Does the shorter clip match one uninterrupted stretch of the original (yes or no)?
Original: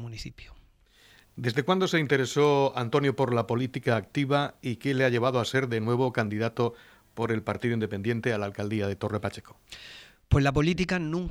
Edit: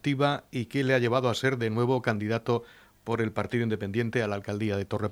yes